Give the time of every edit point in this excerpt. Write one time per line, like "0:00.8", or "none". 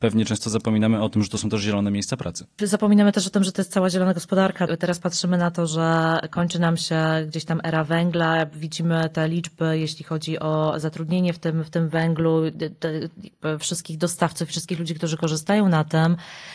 0:04.7